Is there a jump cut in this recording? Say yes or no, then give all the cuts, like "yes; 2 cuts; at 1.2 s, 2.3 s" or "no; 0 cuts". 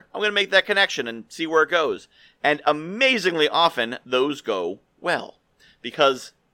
no; 0 cuts